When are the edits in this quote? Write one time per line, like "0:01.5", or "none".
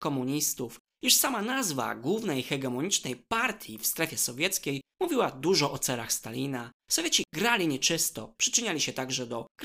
0:08.3